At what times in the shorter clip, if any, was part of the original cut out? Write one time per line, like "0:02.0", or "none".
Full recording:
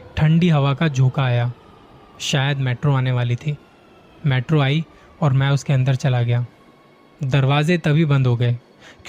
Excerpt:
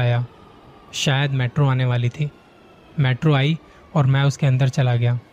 none